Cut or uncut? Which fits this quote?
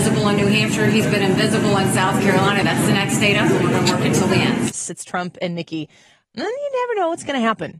cut